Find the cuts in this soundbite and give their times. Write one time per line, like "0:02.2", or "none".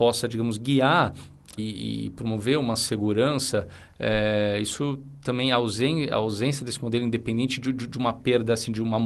0:01.6